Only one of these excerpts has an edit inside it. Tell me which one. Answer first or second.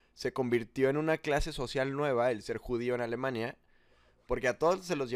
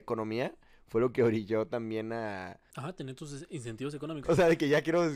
second